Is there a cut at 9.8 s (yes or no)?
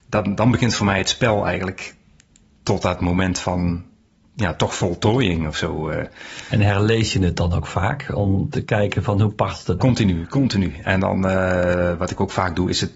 yes